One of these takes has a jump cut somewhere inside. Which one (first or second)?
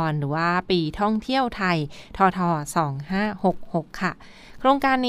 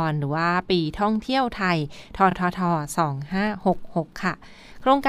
first